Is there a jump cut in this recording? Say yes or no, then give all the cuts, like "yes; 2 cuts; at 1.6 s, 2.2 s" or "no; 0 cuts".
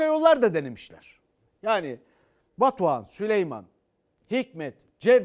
no; 0 cuts